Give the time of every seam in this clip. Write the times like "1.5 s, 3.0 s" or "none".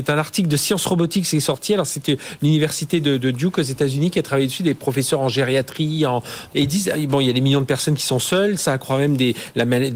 6.5 s, 8.6 s